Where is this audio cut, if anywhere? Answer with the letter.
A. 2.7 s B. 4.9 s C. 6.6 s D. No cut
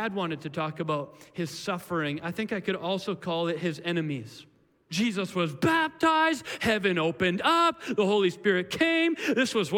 B